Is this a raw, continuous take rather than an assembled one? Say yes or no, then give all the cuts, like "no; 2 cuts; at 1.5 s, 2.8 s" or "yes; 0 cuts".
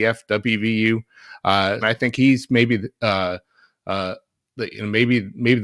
no; 1 cut; at 1.8 s